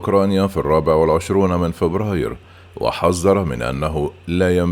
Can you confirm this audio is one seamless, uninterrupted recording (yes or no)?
yes